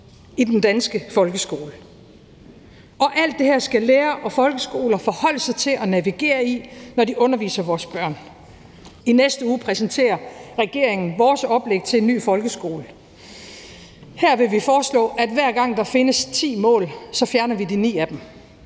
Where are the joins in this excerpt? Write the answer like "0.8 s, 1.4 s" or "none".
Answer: 9.0 s